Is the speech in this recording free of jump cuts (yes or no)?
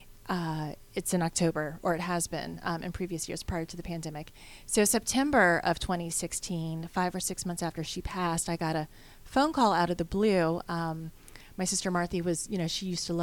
yes